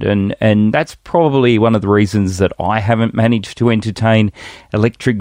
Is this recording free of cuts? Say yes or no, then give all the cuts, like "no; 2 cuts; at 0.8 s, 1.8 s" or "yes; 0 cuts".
yes; 0 cuts